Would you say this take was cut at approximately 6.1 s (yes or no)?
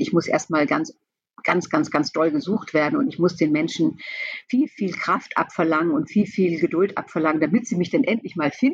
no